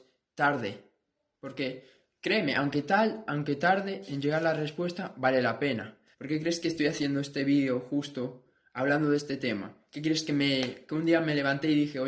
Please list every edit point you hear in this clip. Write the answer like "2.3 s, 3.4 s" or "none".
6.1 s